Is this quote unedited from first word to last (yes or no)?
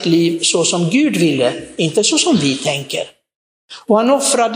yes